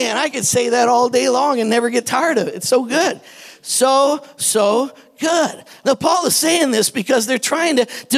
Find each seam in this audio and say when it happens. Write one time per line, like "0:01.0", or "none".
0:05.8